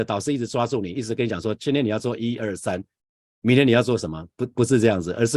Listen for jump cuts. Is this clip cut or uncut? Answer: uncut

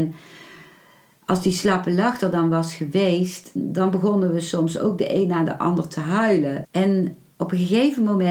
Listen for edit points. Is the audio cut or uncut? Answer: cut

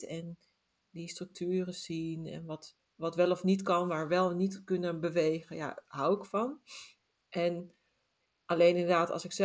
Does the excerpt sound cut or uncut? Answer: uncut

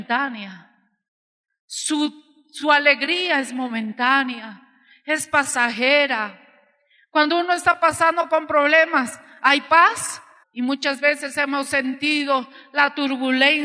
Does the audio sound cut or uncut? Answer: cut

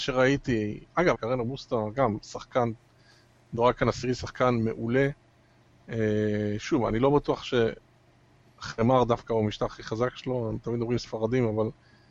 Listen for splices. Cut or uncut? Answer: cut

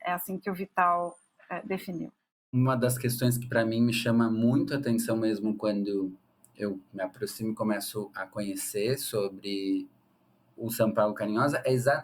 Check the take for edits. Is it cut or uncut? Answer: uncut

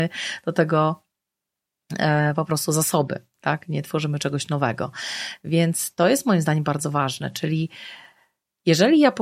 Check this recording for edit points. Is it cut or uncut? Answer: uncut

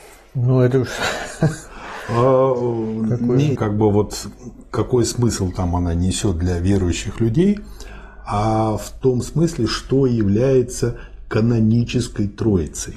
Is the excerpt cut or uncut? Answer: cut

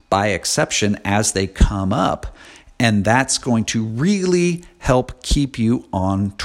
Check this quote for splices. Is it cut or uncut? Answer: uncut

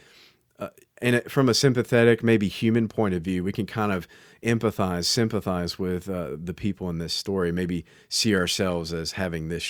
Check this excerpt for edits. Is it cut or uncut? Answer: uncut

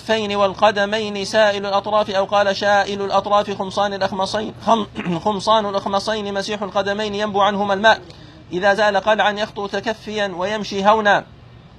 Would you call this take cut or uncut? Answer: cut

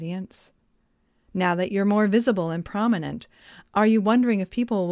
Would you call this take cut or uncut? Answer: uncut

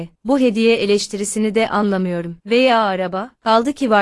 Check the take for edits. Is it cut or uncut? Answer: cut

